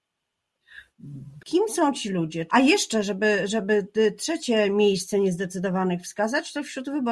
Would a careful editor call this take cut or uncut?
cut